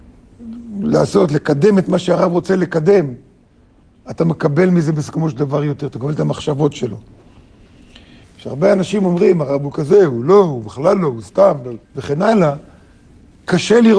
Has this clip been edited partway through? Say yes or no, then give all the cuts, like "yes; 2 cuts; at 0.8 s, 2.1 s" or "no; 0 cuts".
yes; 2 cuts; at 8.2 s, 11.8 s